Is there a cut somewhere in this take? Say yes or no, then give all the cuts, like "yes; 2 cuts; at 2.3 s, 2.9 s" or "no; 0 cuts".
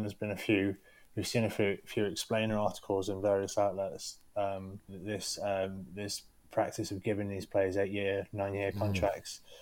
yes; 1 cut; at 4.9 s